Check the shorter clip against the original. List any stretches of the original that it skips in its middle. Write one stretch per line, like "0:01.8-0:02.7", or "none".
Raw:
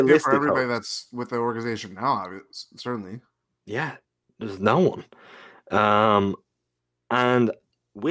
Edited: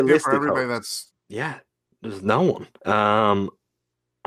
0:01.1-0:03.4
0:05.1-0:05.6